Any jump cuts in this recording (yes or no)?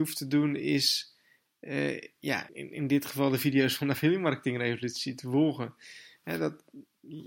yes